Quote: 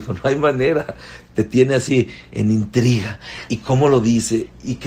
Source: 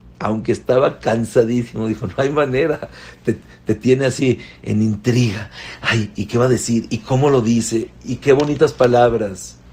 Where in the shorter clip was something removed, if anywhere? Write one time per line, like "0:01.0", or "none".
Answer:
0:01.3
0:03.5